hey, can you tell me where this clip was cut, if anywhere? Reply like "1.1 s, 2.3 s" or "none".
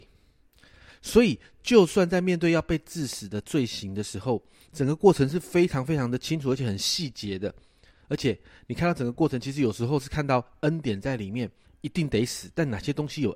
11.6 s